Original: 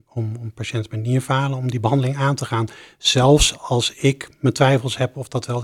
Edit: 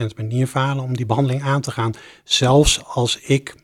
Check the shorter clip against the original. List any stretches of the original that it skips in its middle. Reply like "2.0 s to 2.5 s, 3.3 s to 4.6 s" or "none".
none